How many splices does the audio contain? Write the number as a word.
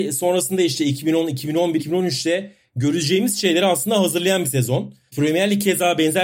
two